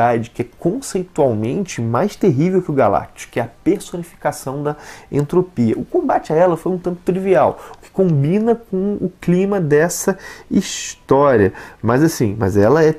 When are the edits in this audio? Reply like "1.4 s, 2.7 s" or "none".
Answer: none